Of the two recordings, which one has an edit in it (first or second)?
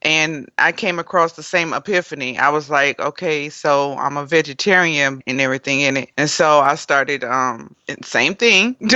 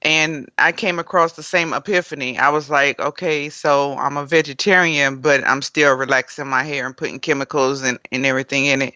first